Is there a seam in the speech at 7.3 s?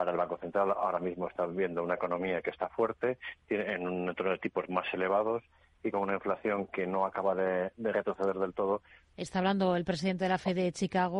no; 1 cut; at 9.1 s

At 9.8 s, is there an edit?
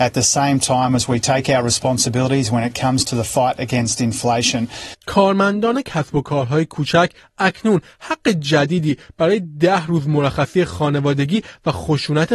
no; 1 cut; at 5.0 s

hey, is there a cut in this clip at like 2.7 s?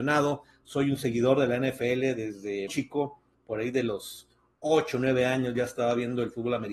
yes; 1 cut; at 2.7 s

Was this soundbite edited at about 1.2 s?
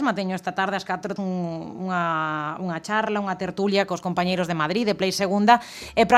yes; 1 cut; at 1.2 s

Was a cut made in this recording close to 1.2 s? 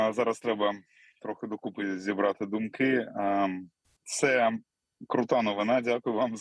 no; 1 cut; at 3.8 s

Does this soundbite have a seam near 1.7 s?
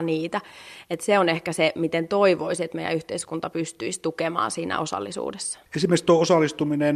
no; 1 cut; at 5.7 s

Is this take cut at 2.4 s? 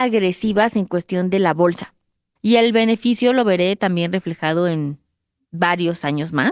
yes; 1 cut; at 2.4 s

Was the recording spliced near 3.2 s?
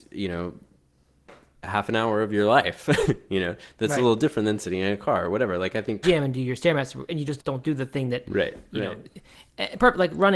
no; 2 cuts; at 6.0 s, 7.4 s

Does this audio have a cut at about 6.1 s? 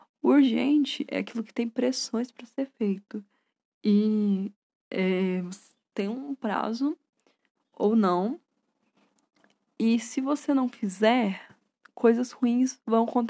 no; 0 cuts

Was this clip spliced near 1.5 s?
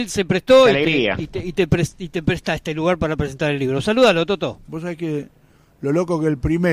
no; 1 cut; at 4.7 s

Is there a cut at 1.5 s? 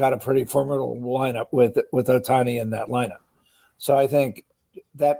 yes; 1 cut; at 1.5 s

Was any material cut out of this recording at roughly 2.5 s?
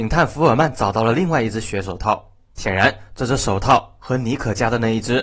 yes; 1 cut; at 2.5 s

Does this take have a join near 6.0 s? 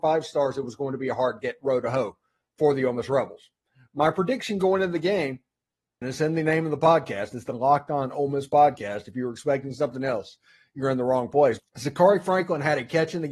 yes; 2 cuts; at 6.0 s, 11.6 s

